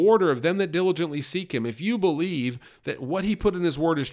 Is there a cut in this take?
no; 0 cuts

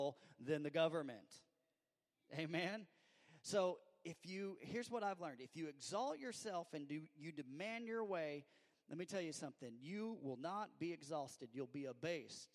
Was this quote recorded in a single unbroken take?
yes; 0 cuts

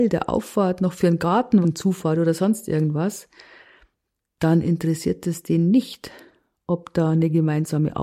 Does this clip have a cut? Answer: yes; 1 cut; at 1.6 s

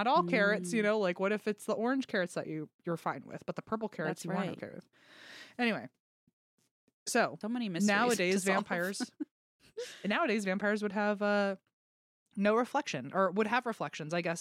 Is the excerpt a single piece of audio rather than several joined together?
no; 1 cut; at 7.4 s

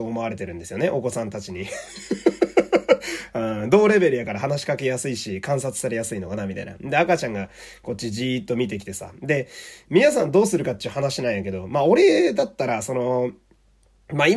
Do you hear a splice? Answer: yes; 1 cut; at 9.8 s

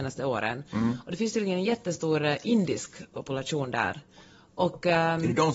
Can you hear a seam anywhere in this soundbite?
no; 0 cuts

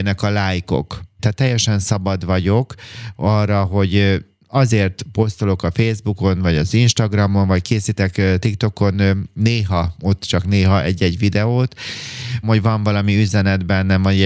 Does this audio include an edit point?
yes; 2 cuts; at 1.2 s, 12.4 s

